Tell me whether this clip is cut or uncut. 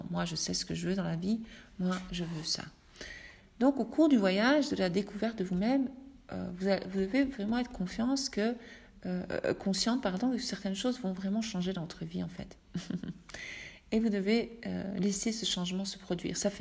uncut